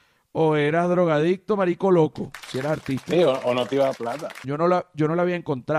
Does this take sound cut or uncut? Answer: cut